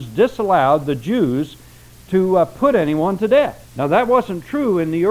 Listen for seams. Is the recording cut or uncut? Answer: cut